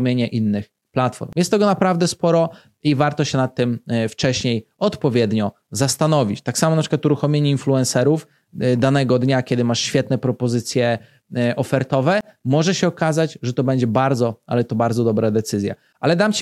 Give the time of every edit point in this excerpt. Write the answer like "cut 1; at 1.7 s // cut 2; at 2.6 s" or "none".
none